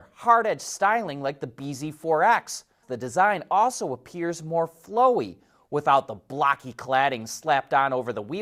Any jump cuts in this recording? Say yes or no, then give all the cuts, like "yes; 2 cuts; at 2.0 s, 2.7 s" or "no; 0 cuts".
yes; 1 cut; at 2.8 s